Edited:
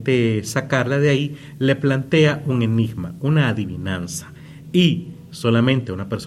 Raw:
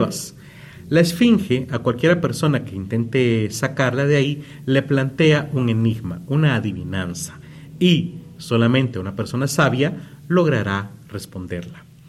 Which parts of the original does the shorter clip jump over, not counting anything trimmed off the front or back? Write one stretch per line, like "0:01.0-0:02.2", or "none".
none